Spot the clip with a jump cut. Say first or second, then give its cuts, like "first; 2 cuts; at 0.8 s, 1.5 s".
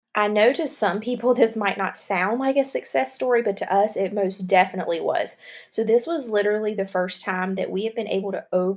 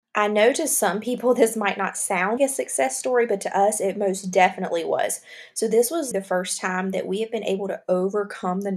second; 2 cuts; at 2.4 s, 6.1 s